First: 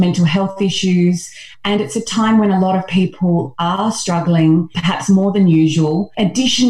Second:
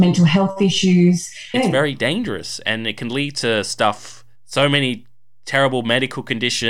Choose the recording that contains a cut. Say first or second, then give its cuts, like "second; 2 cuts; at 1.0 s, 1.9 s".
second; 1 cut; at 1.5 s